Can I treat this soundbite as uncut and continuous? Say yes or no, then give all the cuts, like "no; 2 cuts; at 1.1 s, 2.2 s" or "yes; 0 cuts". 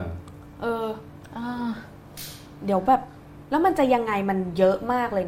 yes; 0 cuts